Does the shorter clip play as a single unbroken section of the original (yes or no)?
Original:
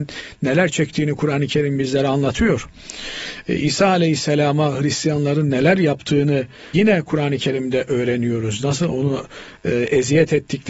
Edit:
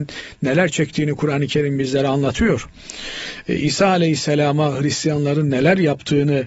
yes